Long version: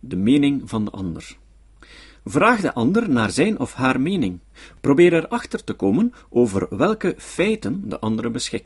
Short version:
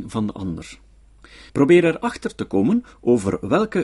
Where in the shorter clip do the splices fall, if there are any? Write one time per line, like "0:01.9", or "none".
0:01.5